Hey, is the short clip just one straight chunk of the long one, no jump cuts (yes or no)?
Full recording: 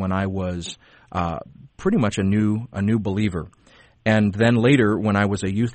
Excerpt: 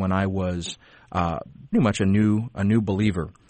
no